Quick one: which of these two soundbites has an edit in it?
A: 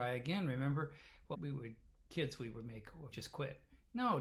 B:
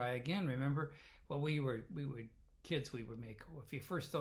A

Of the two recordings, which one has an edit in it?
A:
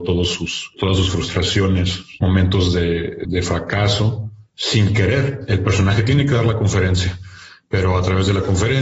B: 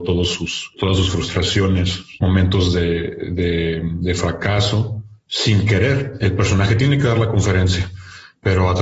A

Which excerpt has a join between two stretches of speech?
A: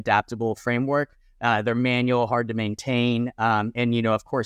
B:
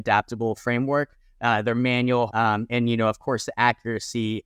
B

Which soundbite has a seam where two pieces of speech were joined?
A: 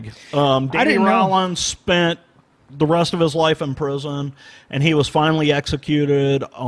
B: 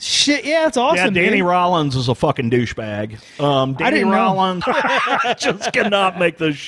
B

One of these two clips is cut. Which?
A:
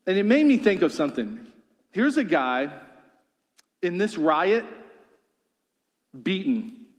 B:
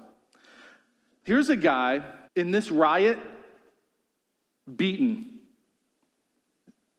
B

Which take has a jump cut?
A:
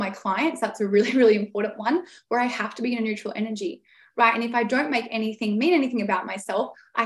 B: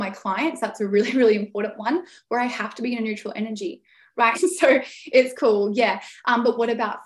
B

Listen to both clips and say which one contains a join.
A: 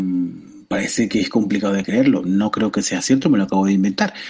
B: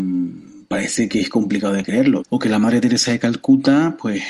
B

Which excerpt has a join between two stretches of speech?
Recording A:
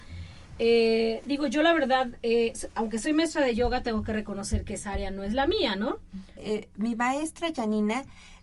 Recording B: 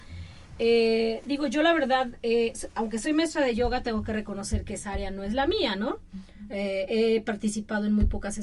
A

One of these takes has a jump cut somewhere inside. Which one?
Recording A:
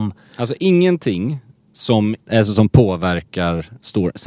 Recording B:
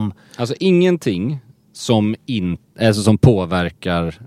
A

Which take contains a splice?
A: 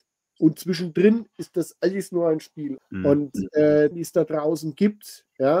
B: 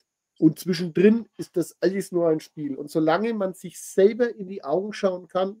A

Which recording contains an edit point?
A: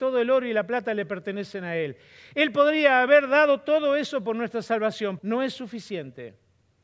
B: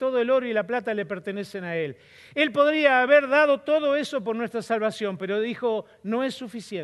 A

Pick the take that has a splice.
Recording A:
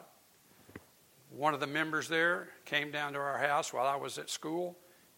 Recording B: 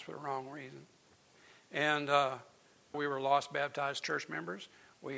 B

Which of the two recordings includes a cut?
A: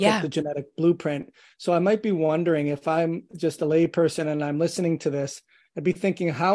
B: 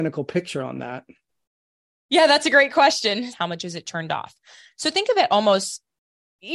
B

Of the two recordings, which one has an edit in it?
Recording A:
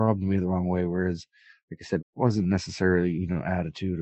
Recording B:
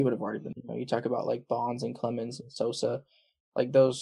A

